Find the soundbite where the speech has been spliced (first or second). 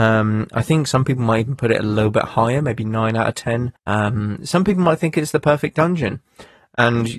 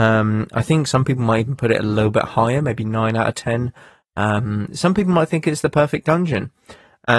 first